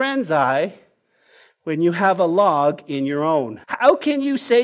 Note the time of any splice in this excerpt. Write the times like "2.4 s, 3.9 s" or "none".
3.6 s